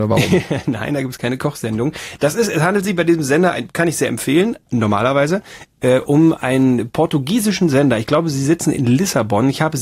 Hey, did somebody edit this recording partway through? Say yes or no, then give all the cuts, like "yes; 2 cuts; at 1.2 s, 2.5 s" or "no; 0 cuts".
no; 0 cuts